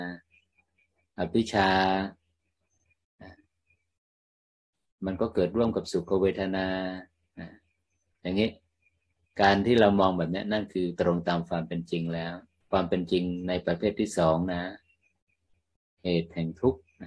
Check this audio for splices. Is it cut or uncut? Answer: uncut